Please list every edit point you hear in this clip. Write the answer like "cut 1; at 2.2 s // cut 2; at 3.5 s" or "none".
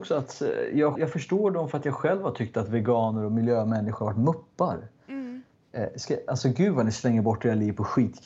cut 1; at 0.9 s